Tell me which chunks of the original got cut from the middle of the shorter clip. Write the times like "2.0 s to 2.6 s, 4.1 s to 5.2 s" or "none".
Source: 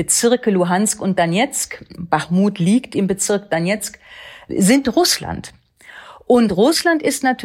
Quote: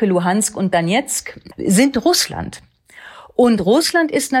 2.0 s to 4.4 s